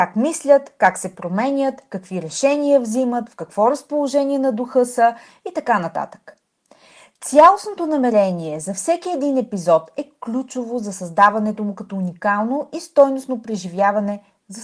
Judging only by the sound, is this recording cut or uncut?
uncut